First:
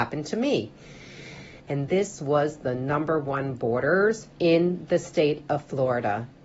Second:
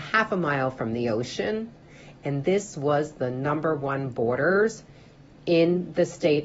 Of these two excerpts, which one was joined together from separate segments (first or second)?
first